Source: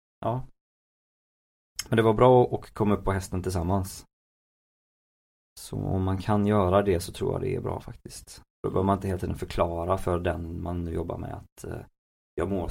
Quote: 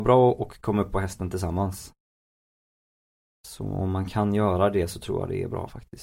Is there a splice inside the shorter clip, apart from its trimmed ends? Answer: no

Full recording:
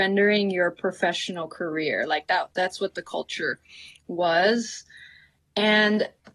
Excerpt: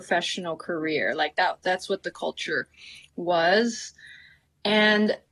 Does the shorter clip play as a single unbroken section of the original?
yes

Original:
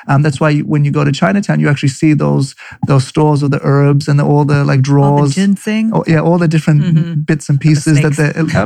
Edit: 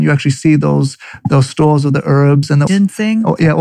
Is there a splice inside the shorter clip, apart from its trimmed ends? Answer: yes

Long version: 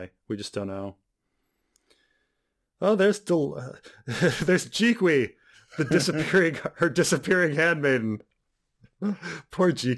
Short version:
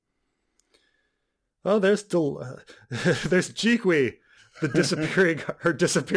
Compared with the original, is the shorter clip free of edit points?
yes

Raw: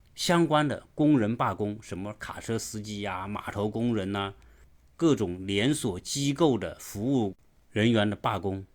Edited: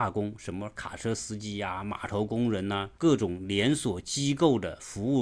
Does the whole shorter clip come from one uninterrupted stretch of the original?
no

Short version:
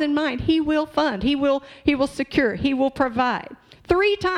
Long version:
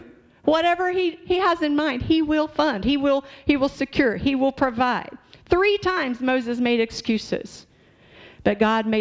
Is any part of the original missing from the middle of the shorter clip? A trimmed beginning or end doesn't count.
no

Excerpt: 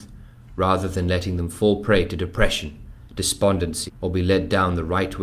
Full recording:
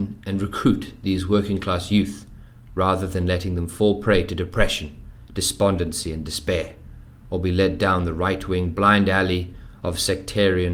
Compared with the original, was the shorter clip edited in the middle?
yes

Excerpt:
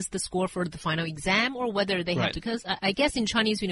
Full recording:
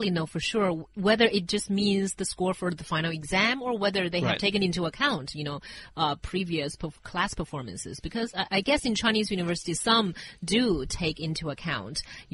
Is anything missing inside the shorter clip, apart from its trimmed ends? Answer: yes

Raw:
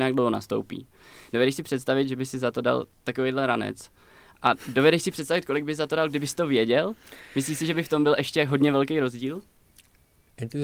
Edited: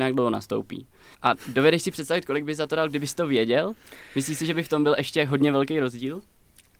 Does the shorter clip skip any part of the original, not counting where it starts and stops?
yes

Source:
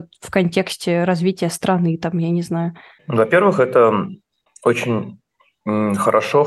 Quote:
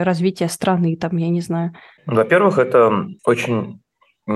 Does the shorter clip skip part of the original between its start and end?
yes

